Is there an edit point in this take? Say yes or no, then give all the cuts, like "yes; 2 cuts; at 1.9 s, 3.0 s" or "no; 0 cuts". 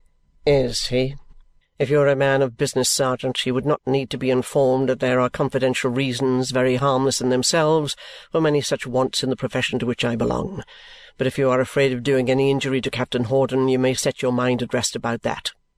yes; 1 cut; at 1.6 s